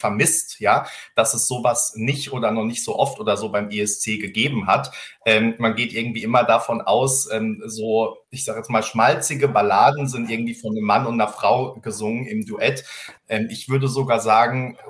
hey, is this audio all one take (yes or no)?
no